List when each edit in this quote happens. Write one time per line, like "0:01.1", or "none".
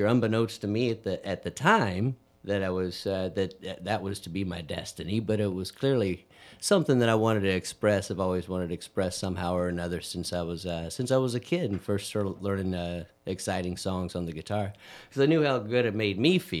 none